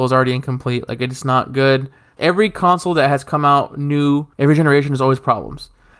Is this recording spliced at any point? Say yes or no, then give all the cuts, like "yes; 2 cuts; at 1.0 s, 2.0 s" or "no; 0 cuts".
yes; 2 cuts; at 2.2 s, 4.3 s